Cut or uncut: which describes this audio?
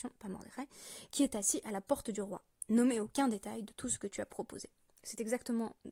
uncut